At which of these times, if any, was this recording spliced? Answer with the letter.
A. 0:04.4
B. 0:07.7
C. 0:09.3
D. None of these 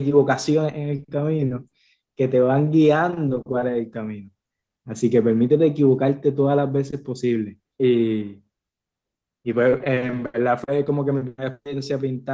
B